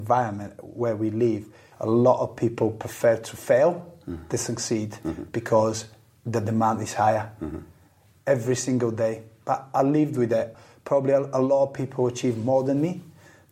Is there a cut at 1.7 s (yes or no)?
yes